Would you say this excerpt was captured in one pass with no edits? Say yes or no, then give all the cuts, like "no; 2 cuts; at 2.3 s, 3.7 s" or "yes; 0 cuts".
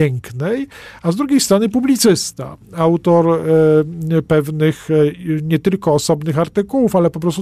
yes; 0 cuts